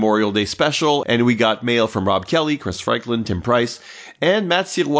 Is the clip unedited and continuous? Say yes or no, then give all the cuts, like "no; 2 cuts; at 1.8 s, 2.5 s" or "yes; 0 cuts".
no; 1 cut; at 1.0 s